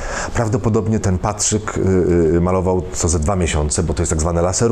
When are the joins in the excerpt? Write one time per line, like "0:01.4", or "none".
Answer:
0:01.0

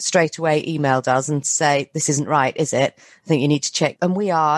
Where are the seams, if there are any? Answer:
none

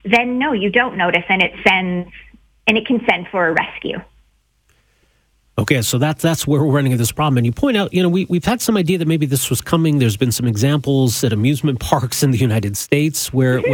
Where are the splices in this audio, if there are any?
none

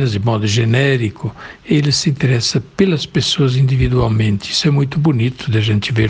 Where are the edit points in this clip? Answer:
none

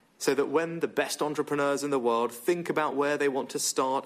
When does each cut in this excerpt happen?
none

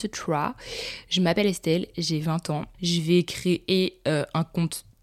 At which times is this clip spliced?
0:02.7

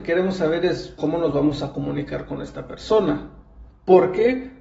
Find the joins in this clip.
0:01.0
0:03.7

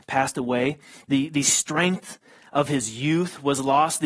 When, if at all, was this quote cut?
none

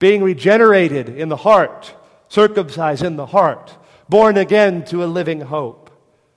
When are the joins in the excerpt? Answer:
none

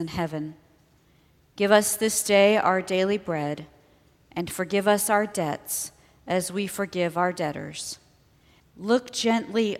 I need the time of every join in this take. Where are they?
0:08.6

